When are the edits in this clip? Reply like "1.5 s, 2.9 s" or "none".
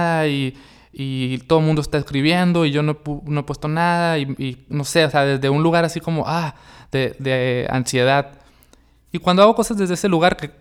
none